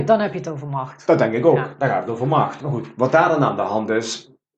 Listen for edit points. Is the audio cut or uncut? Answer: uncut